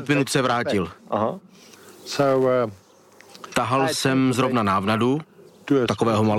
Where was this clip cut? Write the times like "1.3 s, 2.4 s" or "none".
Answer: none